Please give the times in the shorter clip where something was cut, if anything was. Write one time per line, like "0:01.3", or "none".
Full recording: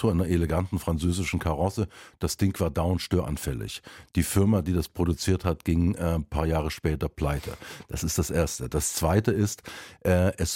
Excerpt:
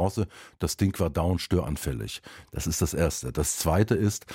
0:02.5